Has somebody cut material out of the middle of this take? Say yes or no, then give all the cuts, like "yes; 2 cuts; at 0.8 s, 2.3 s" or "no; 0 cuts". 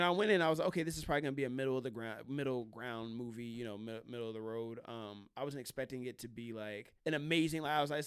yes; 1 cut; at 7.0 s